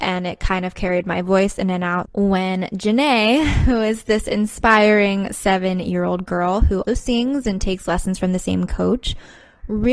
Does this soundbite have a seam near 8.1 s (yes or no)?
no